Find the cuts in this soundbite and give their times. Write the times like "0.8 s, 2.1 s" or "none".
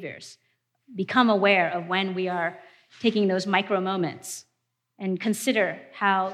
none